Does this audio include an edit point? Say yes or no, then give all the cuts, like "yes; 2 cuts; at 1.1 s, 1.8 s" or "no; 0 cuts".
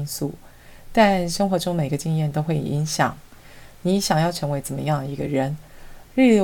no; 0 cuts